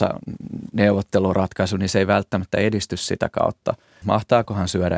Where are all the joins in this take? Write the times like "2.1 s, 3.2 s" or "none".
4.0 s